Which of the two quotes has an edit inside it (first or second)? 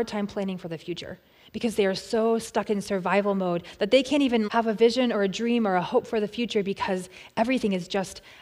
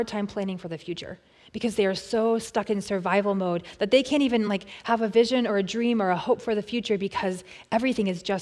first